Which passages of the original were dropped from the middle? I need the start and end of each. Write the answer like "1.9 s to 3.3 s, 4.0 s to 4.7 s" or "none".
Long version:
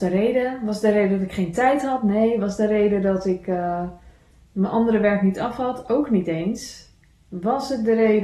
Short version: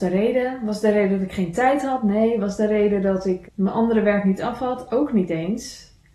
3.4 s to 4.4 s